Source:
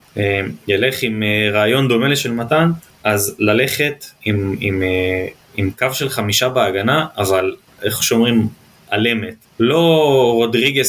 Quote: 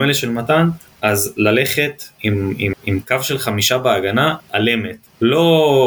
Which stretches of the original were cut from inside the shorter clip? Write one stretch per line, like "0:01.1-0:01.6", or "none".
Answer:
0:04.8-0:05.4
0:07.1-0:08.8